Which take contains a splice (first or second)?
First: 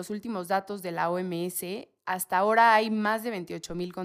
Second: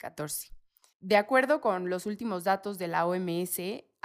second